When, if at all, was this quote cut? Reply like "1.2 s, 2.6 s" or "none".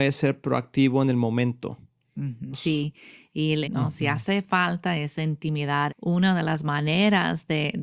2.5 s, 3.6 s, 5.9 s